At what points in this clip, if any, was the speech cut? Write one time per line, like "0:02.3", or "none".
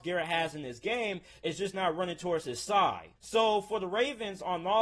0:03.2

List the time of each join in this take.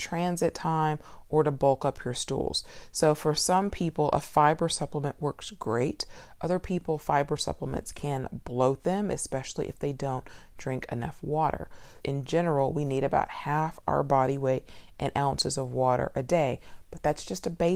0:12.0

